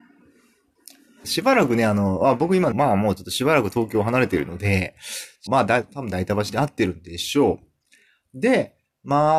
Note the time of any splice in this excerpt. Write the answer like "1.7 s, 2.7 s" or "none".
1.2 s, 2.7 s, 5.5 s